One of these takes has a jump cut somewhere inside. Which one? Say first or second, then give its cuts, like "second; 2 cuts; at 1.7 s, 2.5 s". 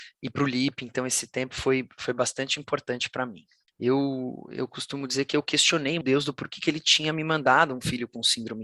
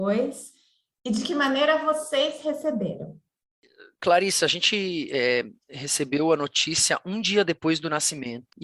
first; 2 cuts; at 3.7 s, 6.0 s